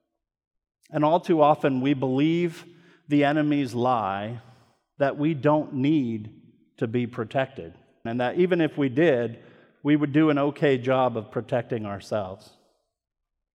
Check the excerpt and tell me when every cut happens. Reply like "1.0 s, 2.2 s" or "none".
8.1 s